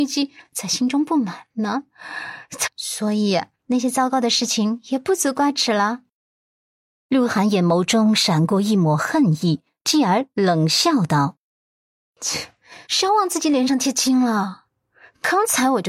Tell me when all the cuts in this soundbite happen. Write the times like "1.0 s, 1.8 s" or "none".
2.6 s, 12.8 s